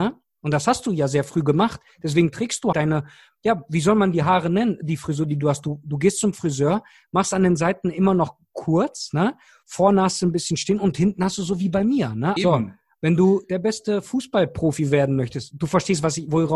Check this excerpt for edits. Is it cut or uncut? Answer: cut